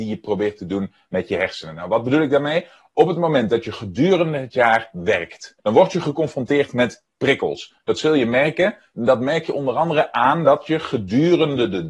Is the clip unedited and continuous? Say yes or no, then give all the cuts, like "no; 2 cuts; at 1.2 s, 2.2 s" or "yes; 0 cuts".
no; 1 cut; at 5.6 s